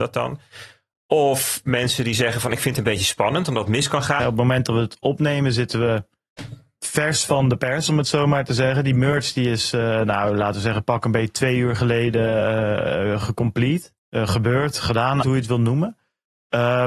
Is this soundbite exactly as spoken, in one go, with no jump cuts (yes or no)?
no